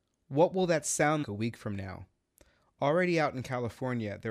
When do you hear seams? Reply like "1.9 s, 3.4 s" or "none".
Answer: 1.2 s